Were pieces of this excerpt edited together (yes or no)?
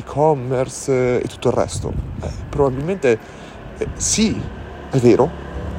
no